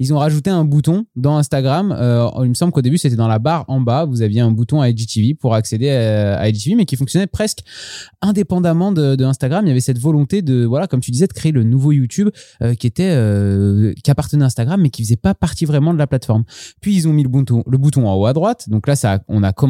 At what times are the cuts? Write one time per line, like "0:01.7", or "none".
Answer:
none